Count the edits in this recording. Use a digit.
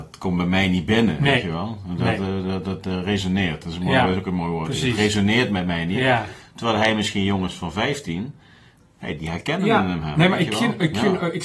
0